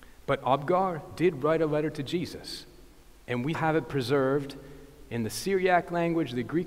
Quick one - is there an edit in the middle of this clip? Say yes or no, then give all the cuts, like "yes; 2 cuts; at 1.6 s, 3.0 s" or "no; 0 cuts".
yes; 1 cut; at 3.5 s